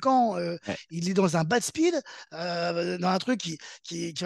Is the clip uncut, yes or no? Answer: yes